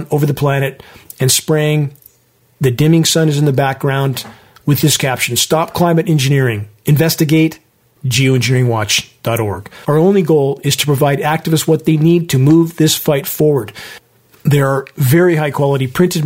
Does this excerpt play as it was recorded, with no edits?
no; 2 cuts; at 8.0 s, 9.8 s

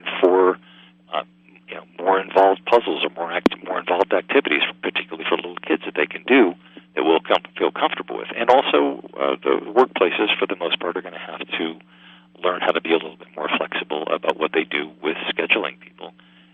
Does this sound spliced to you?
no; 0 cuts

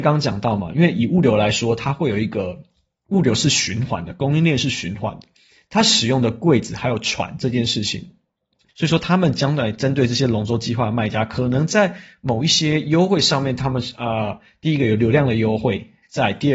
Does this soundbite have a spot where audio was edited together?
yes; 1 cut; at 8.7 s

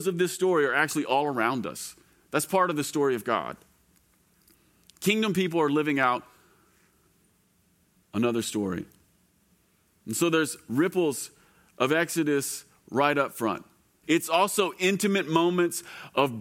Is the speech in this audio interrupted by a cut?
yes; 1 cut; at 14.0 s

